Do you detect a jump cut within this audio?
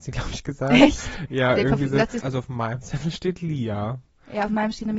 yes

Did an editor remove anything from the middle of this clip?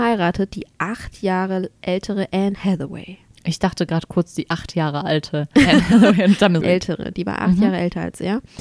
yes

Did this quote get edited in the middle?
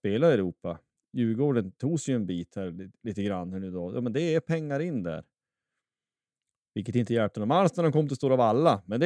no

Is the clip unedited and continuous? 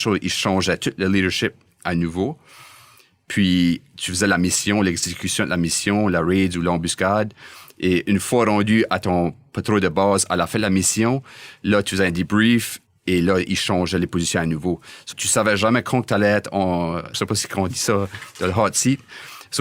no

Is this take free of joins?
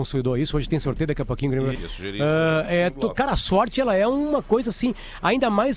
no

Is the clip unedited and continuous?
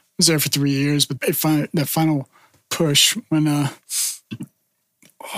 no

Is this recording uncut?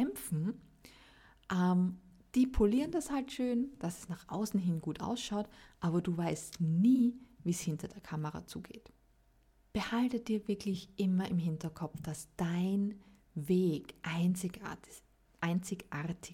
yes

